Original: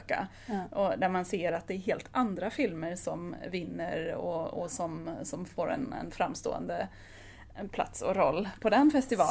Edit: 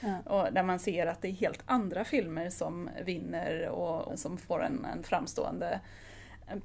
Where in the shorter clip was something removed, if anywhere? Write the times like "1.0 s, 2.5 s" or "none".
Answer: 4.1 s